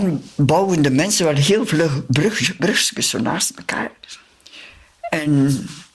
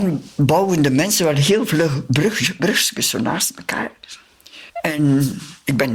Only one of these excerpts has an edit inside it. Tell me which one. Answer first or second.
second